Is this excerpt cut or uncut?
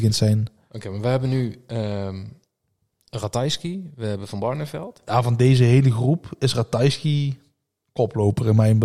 uncut